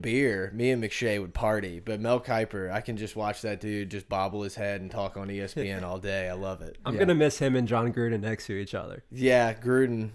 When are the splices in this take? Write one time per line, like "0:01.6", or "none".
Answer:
none